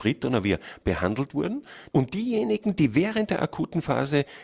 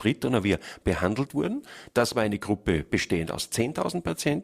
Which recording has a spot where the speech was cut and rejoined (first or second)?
first